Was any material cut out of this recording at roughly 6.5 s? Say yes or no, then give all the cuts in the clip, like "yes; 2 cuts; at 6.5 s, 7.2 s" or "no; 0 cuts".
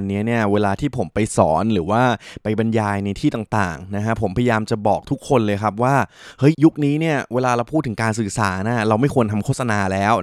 yes; 1 cut; at 6.5 s